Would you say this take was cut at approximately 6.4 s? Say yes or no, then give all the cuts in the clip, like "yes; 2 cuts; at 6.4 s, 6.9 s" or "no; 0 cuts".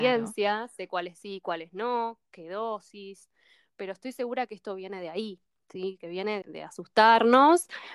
yes; 1 cut; at 6.4 s